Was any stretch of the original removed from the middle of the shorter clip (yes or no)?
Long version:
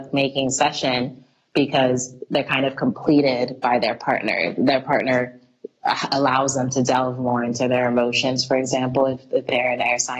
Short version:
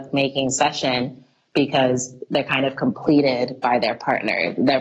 no